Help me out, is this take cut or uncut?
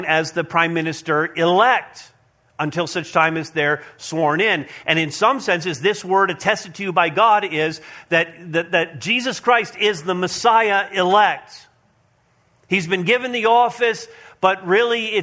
uncut